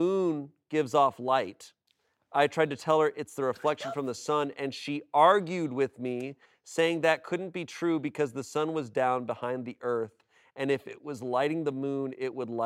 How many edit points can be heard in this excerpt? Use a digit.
0